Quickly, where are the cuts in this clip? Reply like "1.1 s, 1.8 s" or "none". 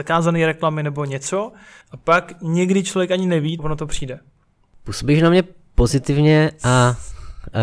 1.8 s, 3.6 s

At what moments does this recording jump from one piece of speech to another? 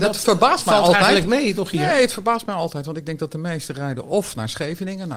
none

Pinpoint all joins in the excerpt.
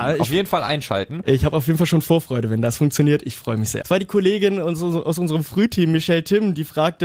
3.8 s

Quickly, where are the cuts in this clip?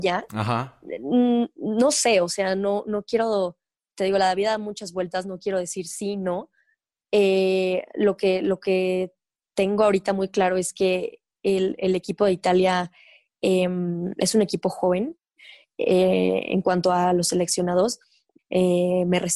18.4 s

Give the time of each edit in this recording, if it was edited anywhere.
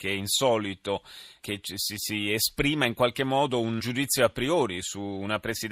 1.4 s, 3.8 s

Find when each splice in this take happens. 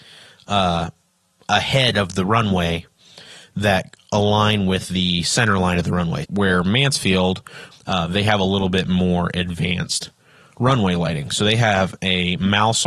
6.2 s, 7.7 s

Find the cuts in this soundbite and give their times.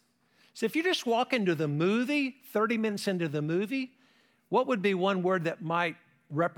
none

